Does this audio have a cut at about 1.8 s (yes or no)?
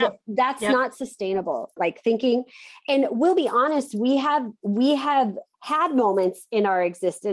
yes